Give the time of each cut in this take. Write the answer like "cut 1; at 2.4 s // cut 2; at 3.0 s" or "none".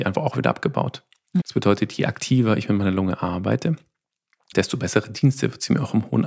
cut 1; at 1.4 s // cut 2; at 4.5 s